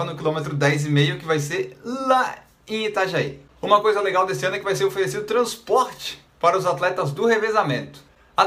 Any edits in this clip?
no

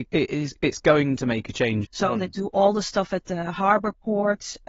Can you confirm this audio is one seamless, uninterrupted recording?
no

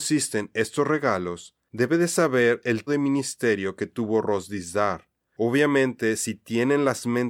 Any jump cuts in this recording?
yes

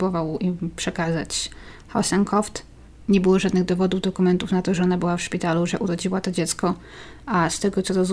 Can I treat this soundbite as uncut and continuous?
yes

